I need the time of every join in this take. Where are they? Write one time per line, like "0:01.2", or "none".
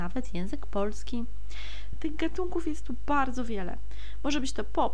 0:01.9